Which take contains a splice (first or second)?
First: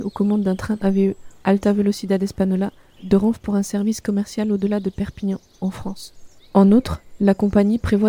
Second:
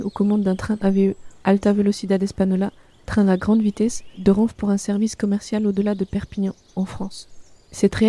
first